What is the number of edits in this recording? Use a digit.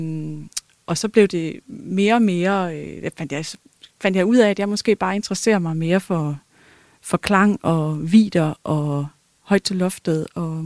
0